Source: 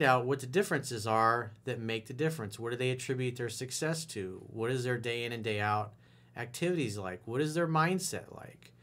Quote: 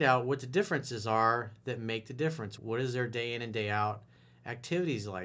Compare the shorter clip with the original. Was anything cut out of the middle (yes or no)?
yes